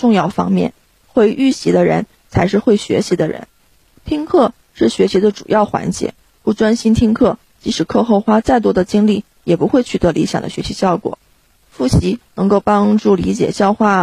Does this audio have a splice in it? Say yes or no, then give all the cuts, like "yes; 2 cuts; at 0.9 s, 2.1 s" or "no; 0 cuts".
no; 0 cuts